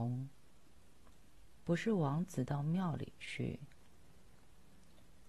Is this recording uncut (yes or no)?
yes